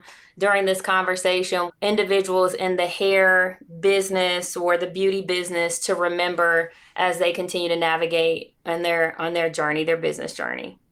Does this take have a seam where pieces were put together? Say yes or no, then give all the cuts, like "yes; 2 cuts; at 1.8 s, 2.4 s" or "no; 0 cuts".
yes; 1 cut; at 1.7 s